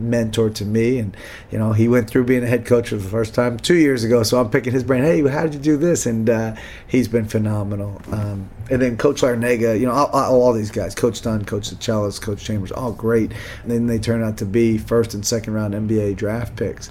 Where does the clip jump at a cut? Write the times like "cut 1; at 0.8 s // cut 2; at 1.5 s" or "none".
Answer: cut 1; at 13.6 s